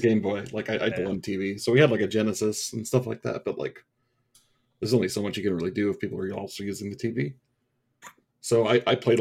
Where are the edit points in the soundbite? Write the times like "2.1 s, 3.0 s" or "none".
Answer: 0.9 s